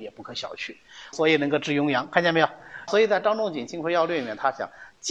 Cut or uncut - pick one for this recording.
cut